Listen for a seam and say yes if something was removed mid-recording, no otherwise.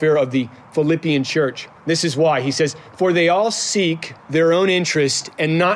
yes